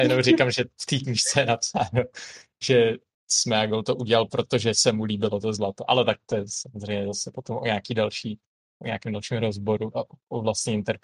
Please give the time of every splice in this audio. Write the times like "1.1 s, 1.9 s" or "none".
none

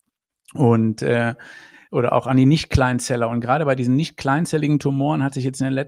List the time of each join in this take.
none

